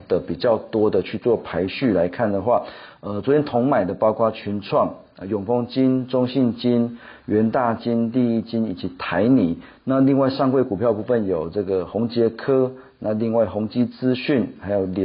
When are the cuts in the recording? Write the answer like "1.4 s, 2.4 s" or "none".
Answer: none

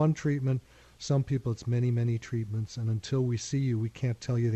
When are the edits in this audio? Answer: none

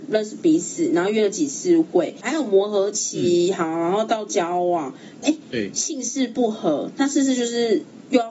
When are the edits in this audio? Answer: 5.2 s

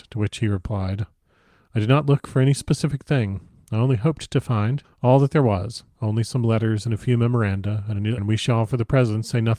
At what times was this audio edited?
4.8 s, 8.2 s

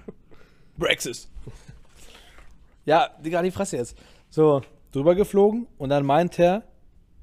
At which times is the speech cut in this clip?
4.9 s

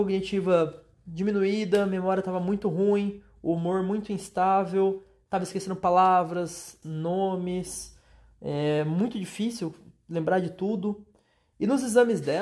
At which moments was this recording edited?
6.8 s

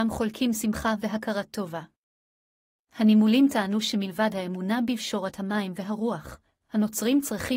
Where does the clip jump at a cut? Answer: none

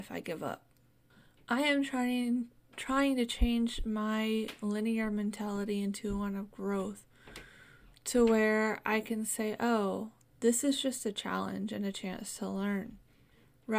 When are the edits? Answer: none

